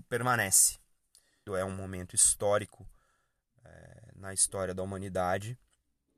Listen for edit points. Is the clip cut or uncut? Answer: cut